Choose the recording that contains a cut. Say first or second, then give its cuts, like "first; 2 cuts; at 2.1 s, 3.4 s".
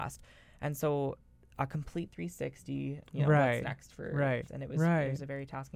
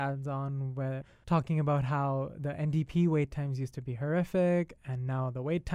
first; 2 cuts; at 3.0 s, 4.5 s